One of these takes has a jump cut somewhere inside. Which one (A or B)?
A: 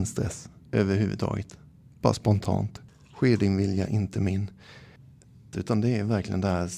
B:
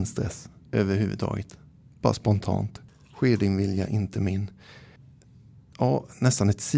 A